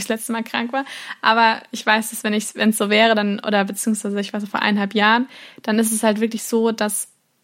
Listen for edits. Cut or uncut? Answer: uncut